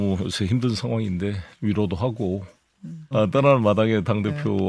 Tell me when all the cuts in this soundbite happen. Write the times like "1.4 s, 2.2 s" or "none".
3.1 s